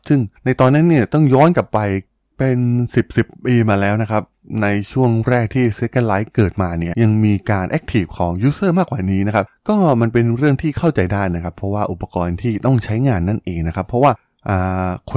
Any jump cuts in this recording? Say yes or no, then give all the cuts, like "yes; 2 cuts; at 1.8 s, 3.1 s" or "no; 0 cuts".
yes; 1 cut; at 6.9 s